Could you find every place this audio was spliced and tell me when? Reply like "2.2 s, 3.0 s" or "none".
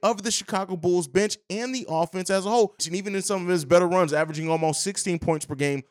2.8 s

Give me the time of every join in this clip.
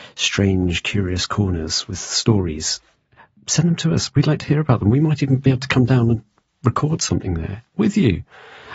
none

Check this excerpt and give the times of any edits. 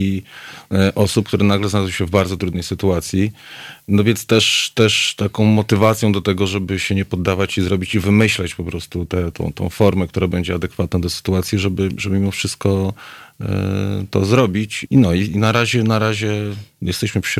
9.3 s, 14.9 s

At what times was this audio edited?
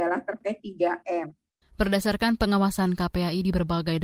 1.6 s

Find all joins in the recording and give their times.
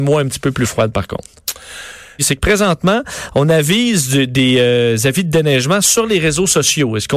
2.2 s

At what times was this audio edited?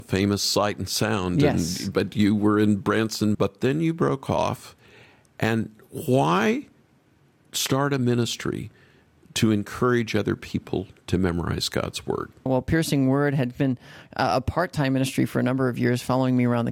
3.3 s, 12.5 s

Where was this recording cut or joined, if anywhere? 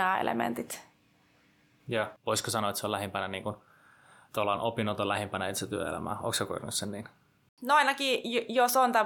2.2 s

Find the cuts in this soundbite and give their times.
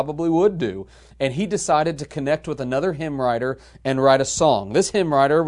none

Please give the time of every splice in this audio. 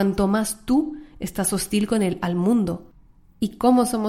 none

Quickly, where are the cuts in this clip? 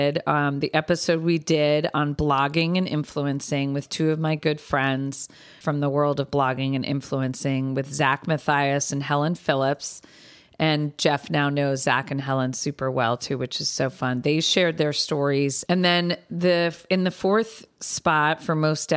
5.6 s, 15.7 s

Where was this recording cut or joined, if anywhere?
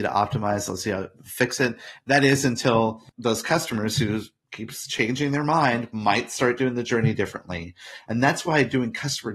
2.0 s

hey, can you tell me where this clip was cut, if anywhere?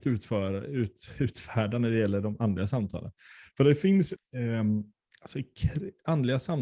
4.2 s

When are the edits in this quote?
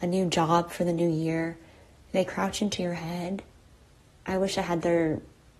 4.1 s

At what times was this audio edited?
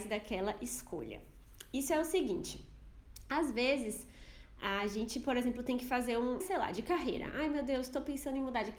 6.4 s

